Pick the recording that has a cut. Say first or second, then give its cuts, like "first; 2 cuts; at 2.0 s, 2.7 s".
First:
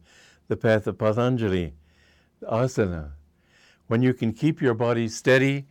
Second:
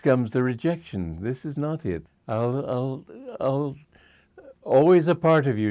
second; 1 cut; at 2.1 s